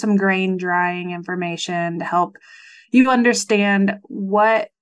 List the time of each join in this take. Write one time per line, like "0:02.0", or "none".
none